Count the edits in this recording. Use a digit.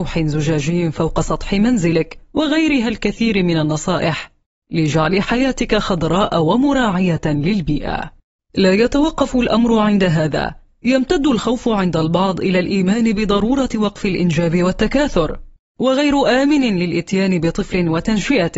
1